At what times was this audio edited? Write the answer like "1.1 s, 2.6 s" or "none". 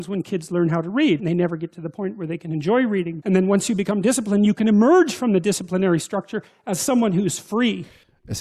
1.2 s, 3.2 s